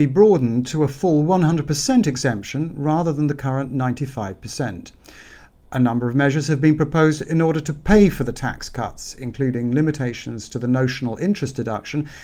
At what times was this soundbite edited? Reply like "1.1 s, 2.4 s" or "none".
none